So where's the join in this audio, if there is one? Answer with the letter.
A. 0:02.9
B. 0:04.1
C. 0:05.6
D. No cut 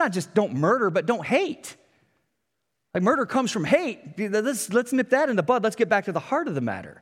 D